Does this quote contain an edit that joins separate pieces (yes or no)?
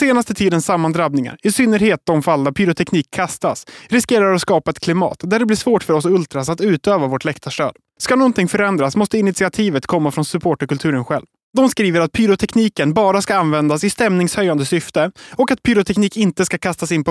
yes